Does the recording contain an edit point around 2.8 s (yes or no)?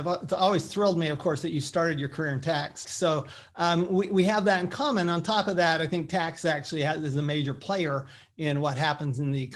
yes